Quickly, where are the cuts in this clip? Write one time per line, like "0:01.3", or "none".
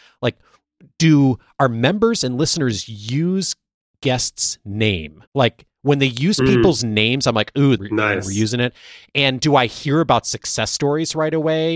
0:05.3
0:07.8